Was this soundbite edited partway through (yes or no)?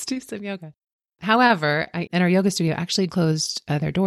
yes